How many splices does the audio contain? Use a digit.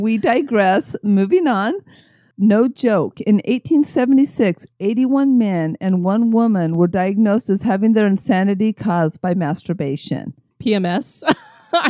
1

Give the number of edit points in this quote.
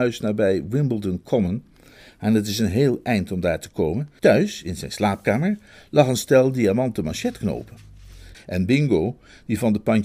2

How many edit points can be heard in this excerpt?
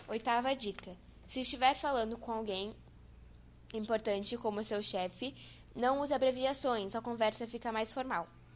1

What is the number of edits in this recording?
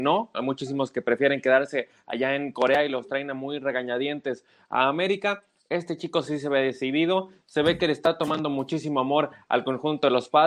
0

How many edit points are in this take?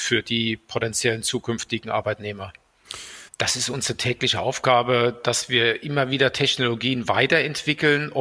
1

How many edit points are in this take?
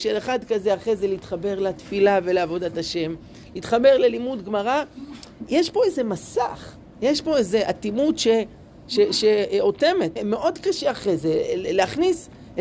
1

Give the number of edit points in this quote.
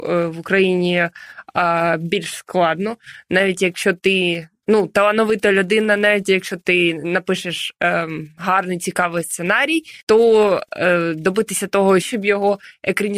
2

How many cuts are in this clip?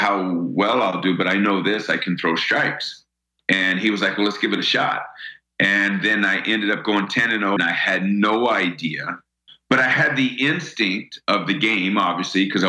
1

